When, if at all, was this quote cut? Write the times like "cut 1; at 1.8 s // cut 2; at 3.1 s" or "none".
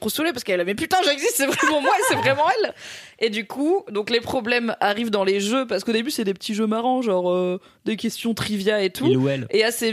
none